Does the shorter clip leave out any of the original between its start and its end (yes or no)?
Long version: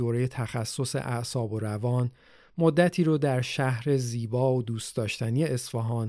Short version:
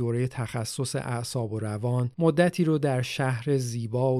yes